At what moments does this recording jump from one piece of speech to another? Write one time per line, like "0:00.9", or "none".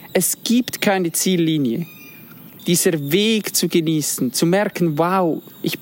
0:02.6